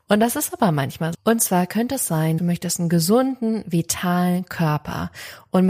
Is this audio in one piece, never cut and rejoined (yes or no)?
no